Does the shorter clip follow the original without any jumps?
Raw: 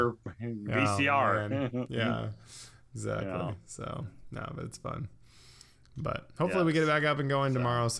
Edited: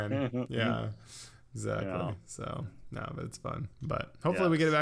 no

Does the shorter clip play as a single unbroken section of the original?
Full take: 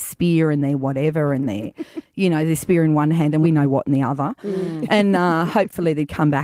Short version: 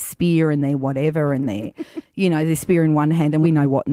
yes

